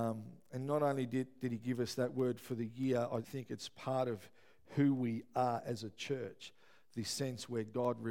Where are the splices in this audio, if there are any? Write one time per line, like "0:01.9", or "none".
0:03.2